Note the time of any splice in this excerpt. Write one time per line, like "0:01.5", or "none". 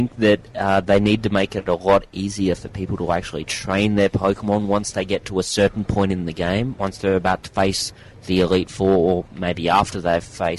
0:06.8